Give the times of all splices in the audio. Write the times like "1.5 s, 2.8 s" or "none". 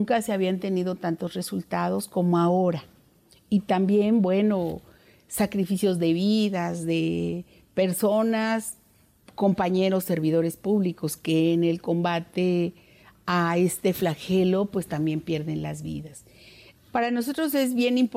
16.8 s